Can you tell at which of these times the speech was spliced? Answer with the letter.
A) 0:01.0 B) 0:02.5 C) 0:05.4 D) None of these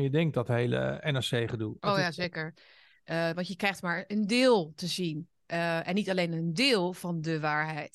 B